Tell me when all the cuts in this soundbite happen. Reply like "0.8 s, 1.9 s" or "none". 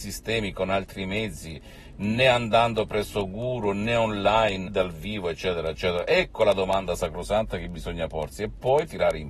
4.7 s, 8.3 s